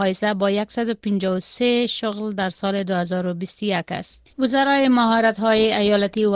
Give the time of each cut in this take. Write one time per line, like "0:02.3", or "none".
0:04.3

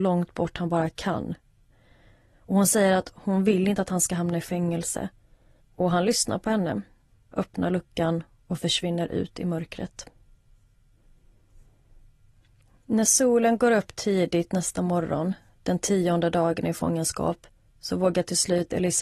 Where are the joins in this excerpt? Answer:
0:05.6
0:07.3

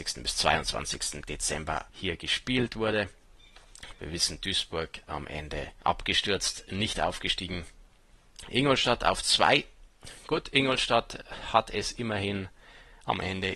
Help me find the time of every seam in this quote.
0:01.9
0:03.9

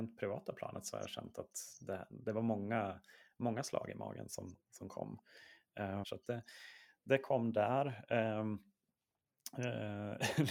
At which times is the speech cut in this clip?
0:06.0

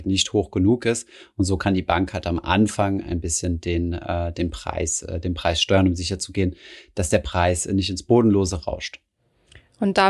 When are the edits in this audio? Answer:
none

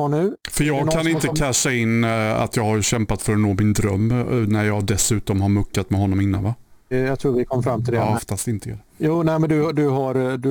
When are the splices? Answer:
0:06.9
0:08.2

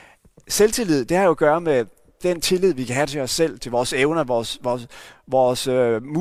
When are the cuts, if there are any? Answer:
0:03.6

